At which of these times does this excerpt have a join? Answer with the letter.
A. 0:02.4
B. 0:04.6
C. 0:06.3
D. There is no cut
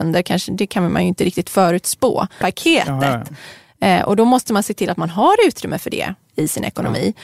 A